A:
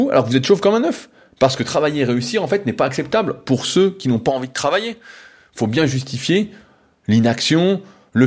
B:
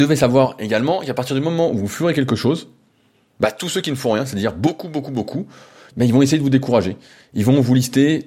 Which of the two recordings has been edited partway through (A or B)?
B